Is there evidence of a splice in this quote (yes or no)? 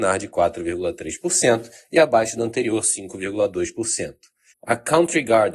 yes